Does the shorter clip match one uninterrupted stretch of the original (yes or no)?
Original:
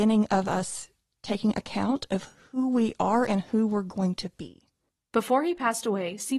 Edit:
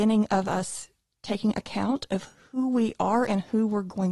yes